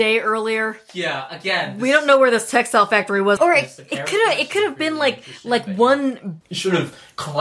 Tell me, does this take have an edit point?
yes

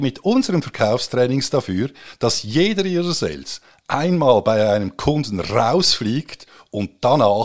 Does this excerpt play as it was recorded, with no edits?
yes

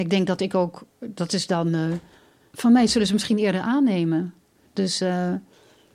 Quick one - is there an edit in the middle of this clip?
yes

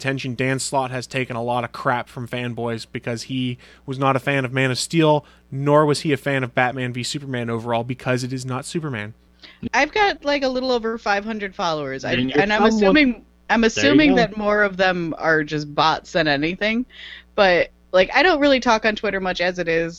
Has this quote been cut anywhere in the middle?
yes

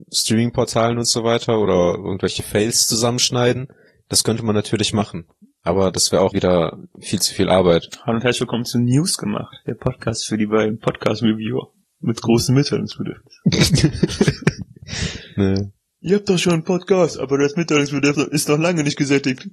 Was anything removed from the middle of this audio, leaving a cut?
yes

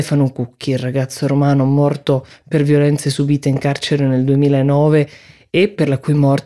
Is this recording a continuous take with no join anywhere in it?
yes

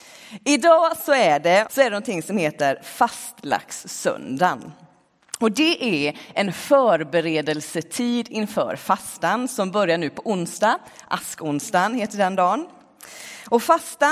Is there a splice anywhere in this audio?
yes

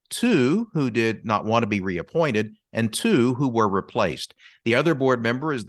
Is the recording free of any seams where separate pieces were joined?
yes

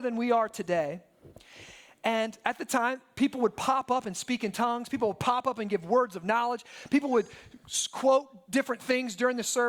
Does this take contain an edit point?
no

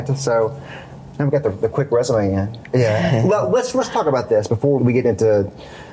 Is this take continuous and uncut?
no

